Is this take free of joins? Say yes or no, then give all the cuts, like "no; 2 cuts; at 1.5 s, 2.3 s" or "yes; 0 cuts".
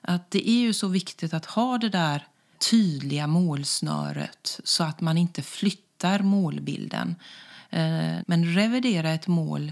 no; 2 cuts; at 2.5 s, 8.2 s